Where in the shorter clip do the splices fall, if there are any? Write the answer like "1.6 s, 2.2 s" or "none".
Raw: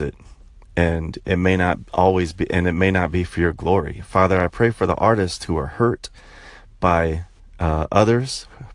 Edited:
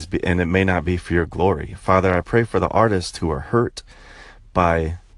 none

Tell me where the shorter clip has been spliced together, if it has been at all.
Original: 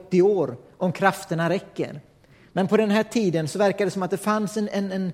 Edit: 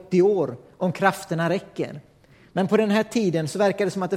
none

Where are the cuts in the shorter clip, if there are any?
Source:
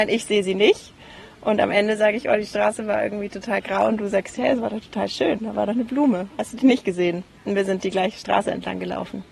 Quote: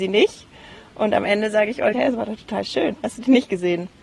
1.9 s, 3.0 s

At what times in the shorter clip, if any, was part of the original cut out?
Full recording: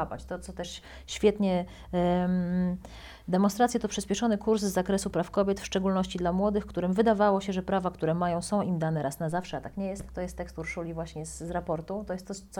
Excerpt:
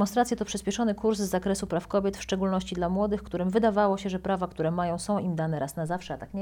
none

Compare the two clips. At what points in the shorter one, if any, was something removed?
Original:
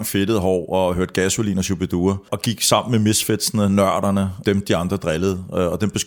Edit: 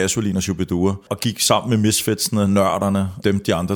none

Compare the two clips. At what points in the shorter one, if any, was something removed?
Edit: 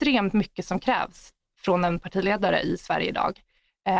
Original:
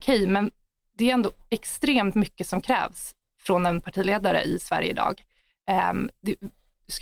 none

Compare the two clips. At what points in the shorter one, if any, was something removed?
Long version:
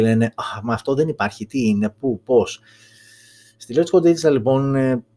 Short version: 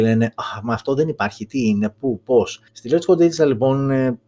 2.7 s

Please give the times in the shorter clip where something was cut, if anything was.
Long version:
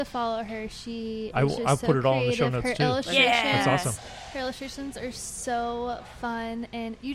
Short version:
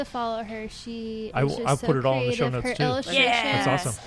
none

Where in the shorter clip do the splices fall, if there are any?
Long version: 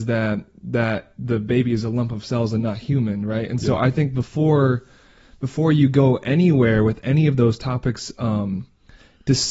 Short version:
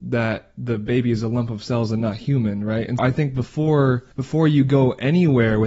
3.0 s, 4.1 s

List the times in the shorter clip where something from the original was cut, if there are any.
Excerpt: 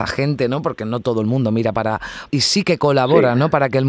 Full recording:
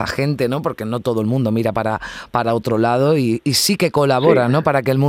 2.3 s

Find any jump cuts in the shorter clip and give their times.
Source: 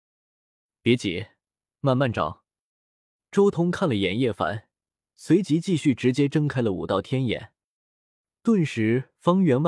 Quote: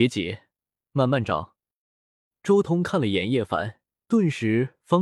3.9 s

